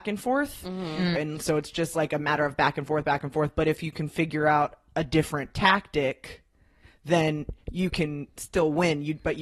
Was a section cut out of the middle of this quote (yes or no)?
yes